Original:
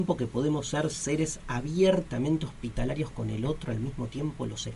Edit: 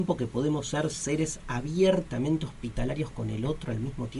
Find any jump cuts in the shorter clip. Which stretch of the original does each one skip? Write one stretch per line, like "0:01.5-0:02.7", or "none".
none